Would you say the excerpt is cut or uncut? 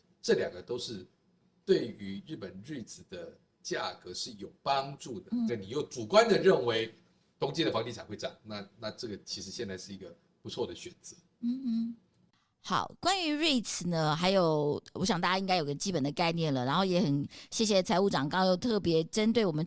cut